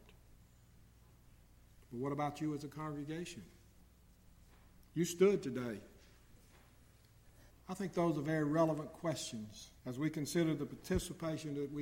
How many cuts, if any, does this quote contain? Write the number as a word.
two